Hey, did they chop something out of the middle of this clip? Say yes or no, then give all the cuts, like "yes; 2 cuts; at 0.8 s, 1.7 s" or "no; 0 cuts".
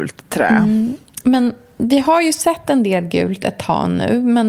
no; 0 cuts